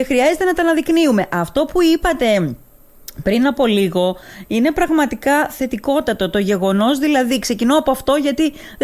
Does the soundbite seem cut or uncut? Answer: uncut